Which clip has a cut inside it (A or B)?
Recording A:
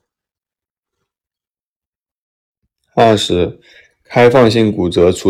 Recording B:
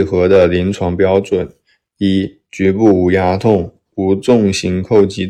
B